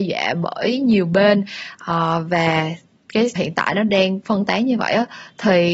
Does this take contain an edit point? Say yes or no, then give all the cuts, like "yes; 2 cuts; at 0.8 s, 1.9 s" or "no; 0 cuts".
yes; 1 cut; at 3.4 s